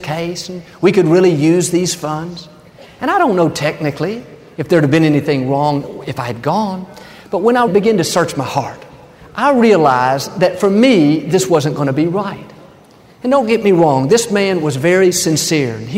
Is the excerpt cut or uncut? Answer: cut